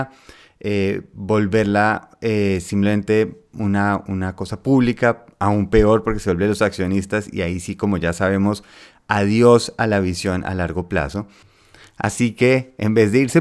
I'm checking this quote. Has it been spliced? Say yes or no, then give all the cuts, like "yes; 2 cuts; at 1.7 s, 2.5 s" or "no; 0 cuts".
no; 0 cuts